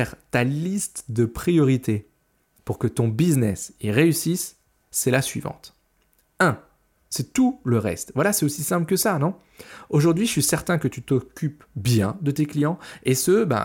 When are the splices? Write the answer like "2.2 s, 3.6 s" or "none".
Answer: 7.0 s